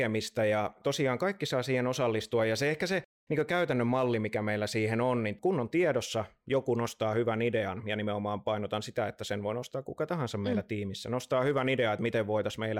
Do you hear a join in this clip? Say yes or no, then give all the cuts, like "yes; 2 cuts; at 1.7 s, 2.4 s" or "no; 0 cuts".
no; 0 cuts